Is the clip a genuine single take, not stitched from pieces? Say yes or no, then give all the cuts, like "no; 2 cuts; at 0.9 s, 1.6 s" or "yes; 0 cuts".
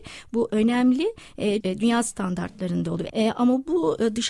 no; 2 cuts; at 1.6 s, 3.1 s